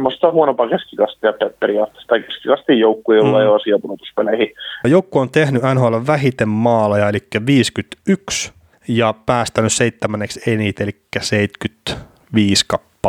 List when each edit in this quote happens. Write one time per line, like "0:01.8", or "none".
0:04.8